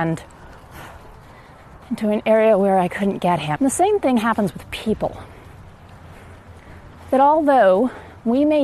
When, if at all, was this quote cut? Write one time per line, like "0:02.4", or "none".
0:01.8
0:03.6